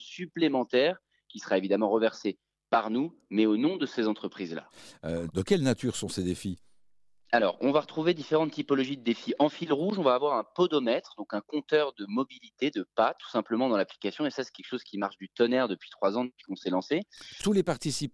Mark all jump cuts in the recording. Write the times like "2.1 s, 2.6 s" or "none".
5.3 s